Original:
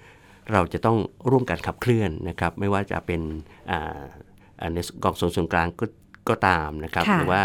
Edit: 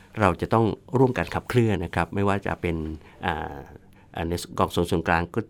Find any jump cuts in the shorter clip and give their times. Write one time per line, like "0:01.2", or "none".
0:01.8